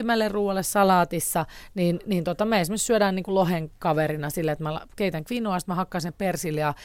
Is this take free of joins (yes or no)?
yes